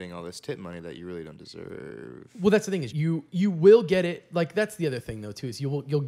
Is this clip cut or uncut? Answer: cut